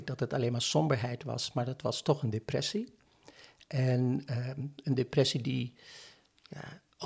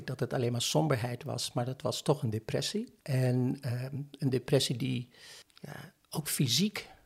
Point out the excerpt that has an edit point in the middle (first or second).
second